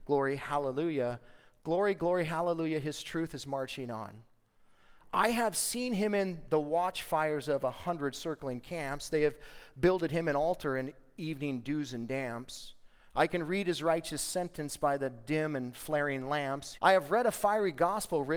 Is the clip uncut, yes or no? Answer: no